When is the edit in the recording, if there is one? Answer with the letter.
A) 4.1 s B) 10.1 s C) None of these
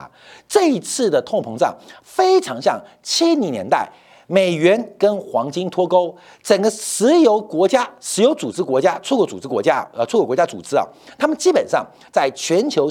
B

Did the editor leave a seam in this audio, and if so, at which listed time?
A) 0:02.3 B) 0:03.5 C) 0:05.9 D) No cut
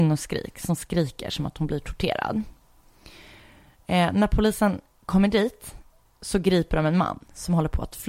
D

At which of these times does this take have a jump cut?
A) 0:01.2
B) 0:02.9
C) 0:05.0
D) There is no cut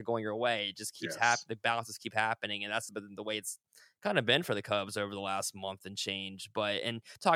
B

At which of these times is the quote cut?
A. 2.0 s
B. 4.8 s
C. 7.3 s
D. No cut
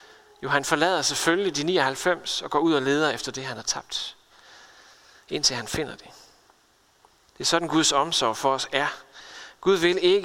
C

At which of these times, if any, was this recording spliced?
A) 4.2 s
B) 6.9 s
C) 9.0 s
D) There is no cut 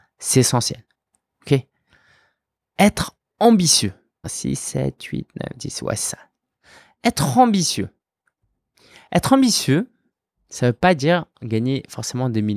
A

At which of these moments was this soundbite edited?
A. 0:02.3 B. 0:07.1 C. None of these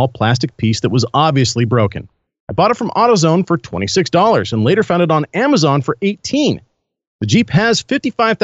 A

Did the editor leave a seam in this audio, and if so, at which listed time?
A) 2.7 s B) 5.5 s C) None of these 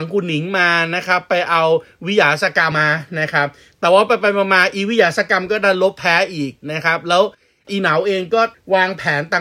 A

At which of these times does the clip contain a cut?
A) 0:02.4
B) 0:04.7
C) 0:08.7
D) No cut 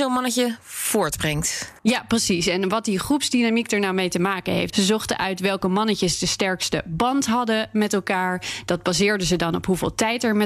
B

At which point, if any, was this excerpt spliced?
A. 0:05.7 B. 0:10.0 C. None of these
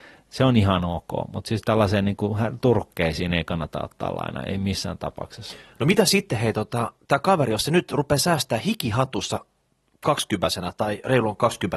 C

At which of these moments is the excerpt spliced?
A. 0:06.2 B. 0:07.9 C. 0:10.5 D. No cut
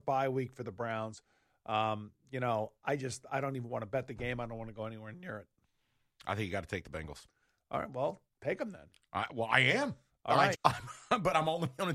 C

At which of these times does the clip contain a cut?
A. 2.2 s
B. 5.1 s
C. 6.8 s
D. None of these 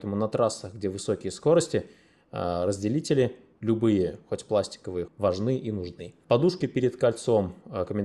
B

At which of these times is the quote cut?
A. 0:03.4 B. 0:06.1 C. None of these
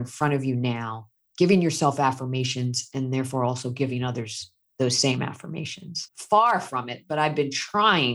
B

